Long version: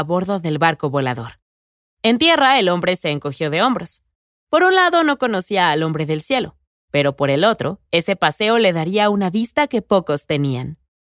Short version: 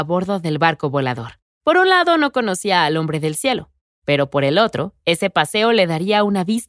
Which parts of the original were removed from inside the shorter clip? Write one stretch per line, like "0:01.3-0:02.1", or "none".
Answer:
0:01.5-0:04.4